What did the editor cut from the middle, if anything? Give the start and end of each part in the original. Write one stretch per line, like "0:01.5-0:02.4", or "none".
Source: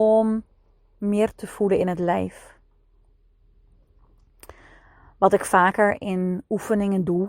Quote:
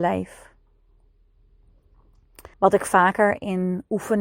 0:04.6-0:05.1